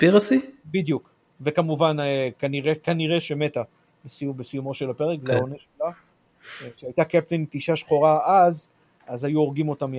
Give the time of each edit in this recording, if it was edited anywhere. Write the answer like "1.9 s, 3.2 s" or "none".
none